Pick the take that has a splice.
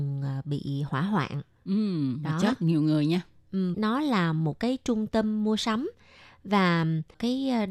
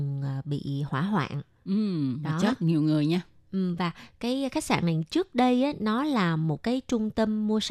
first; 1 cut; at 3.7 s

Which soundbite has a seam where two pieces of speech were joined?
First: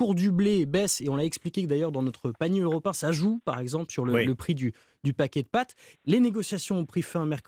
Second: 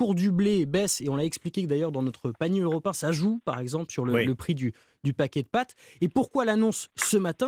first; 1 cut; at 5.9 s

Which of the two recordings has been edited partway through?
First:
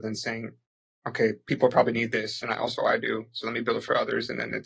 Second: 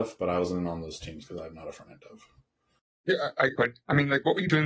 second; 1 cut; at 3.6 s

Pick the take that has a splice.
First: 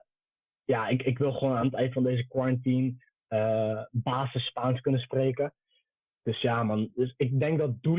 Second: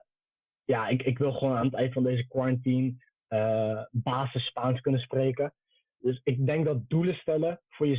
second; 1 cut; at 6.0 s

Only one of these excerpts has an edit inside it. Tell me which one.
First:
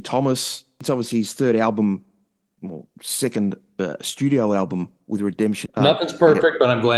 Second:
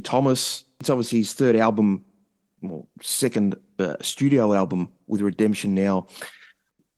first; 1 cut; at 5.7 s

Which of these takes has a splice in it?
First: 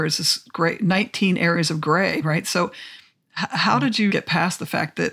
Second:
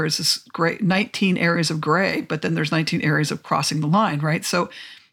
first; 2 cuts; at 2.2 s, 4.1 s

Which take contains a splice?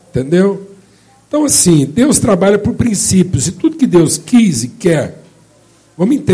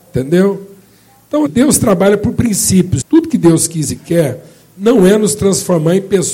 second; 2 cuts; at 1.5 s, 3.0 s

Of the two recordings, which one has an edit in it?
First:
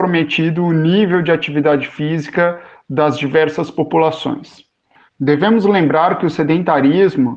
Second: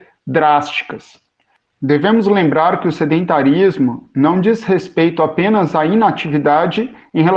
first; 1 cut; at 5.1 s

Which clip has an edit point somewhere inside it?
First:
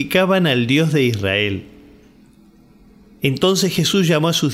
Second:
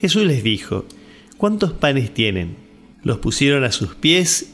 second; 1 cut; at 2.9 s

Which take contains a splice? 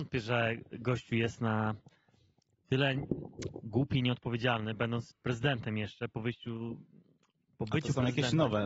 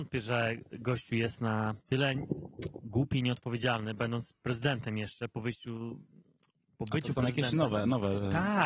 second; 1 cut; at 1.8 s

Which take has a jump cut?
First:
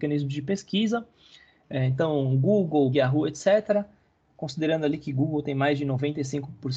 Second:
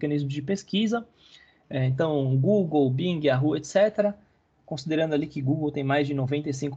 first; 1 cut; at 2.9 s

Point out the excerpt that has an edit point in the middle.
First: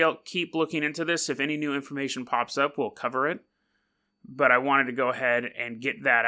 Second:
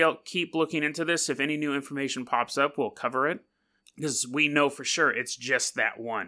second; 1 cut; at 3.8 s

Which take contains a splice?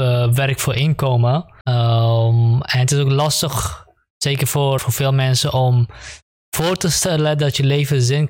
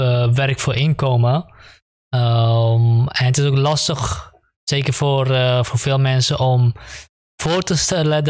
first; 2 cuts; at 1.6 s, 4.8 s

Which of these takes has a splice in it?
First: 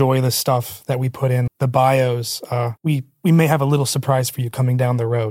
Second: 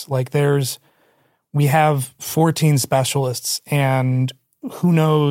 first; 2 cuts; at 1.5 s, 2.8 s

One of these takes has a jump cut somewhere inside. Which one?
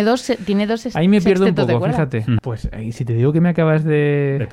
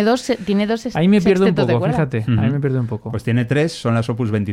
first; 1 cut; at 2.4 s

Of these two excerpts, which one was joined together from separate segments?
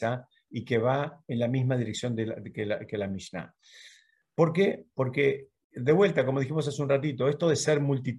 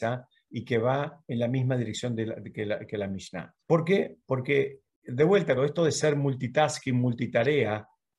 second; 2 cuts; at 3.6 s, 5.6 s

